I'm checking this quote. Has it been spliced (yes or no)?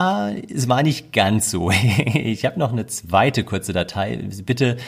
no